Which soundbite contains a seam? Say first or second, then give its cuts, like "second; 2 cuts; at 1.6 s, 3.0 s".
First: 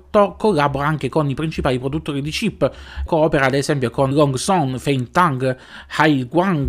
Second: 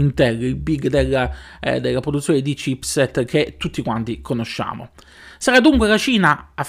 first; 2 cuts; at 3.1 s, 4.1 s